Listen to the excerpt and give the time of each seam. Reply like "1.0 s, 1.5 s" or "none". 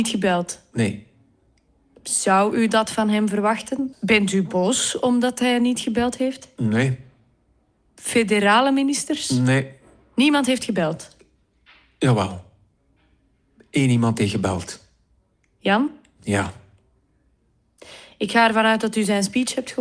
3.9 s